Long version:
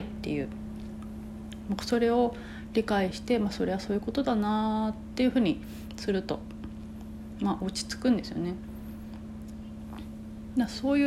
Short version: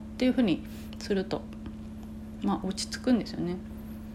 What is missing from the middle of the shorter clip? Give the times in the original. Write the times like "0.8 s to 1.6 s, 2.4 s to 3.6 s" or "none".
none

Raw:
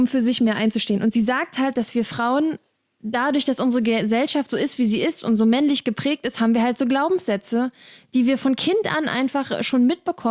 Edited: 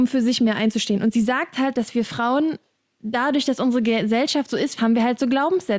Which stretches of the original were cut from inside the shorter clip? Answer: 4.8 s to 6.3 s

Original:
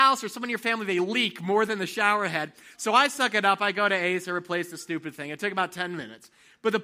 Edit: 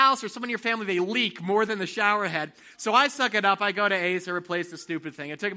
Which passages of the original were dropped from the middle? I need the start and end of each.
none

